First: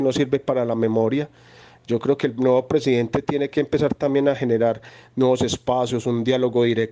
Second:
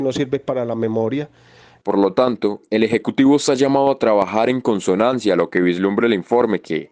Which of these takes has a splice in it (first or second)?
second